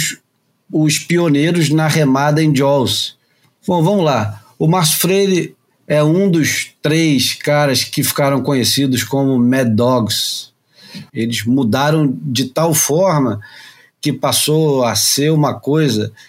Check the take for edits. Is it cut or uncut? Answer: cut